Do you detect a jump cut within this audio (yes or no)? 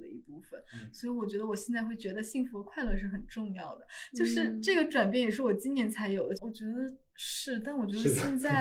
yes